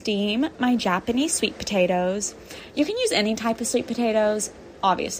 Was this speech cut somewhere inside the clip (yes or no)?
no